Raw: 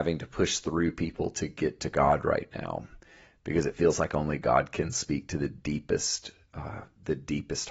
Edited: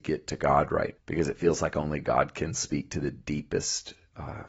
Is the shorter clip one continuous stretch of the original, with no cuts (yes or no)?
no